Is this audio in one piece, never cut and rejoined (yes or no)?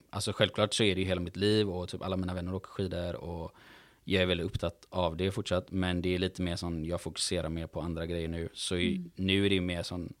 yes